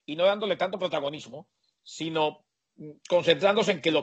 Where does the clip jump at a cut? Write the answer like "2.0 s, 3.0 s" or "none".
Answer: none